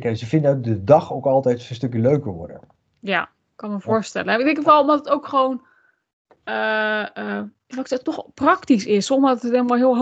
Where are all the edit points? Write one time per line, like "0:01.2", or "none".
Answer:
none